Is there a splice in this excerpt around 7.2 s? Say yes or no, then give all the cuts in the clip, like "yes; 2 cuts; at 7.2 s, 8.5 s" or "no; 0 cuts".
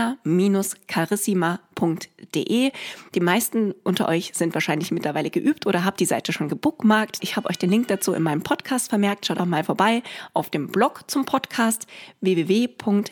yes; 2 cuts; at 7.2 s, 9.4 s